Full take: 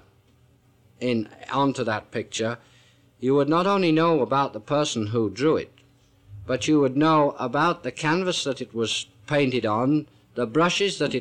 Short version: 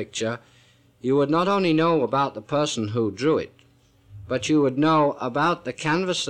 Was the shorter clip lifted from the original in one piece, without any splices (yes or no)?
yes